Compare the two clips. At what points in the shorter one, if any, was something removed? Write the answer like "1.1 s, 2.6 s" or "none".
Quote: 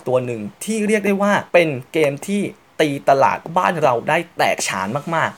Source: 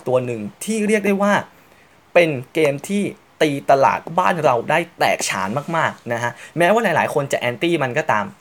1.5 s